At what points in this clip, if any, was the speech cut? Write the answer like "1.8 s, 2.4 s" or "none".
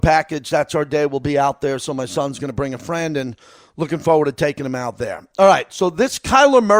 none